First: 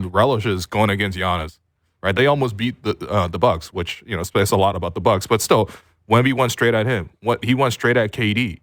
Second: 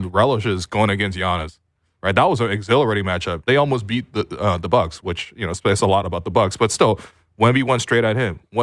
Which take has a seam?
first; 1 cut; at 2.1 s

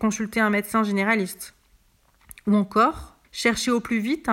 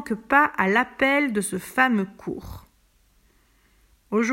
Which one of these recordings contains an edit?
first; 1 cut; at 3.2 s

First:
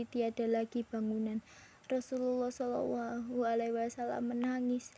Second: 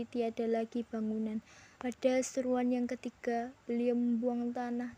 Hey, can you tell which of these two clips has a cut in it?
second; 2 cuts; at 1.8 s, 3.6 s

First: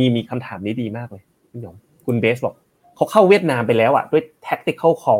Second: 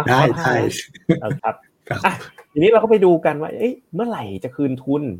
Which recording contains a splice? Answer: second; 1 cut; at 1.4 s

